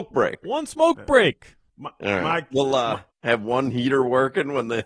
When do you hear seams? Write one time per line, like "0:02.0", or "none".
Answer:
0:01.7
0:03.1